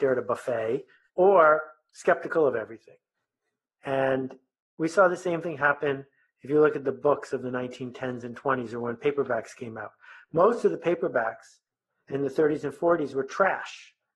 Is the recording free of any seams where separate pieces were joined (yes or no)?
no